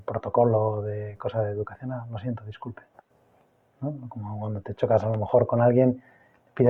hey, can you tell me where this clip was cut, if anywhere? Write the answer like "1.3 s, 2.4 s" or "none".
none

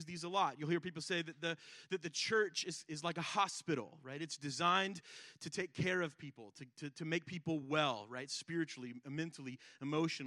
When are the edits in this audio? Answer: none

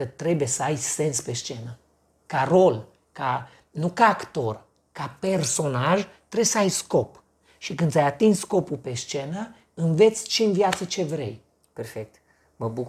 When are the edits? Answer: none

